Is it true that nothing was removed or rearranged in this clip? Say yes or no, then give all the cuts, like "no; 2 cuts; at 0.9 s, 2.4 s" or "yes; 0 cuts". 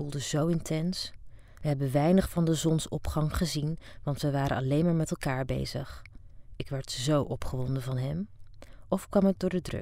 yes; 0 cuts